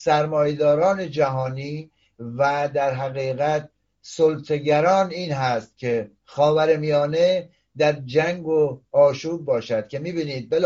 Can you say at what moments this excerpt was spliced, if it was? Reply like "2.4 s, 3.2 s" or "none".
6.2 s